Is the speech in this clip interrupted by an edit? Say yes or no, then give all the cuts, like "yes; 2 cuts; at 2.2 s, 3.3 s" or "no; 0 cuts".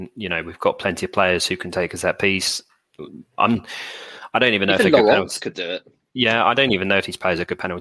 yes; 1 cut; at 3.4 s